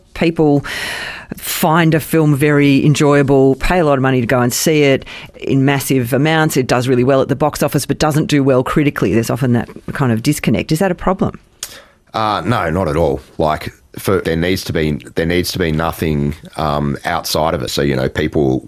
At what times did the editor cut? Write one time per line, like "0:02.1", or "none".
0:14.2
0:17.7